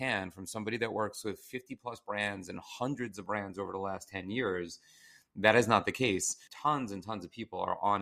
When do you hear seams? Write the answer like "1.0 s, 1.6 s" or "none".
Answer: 6.5 s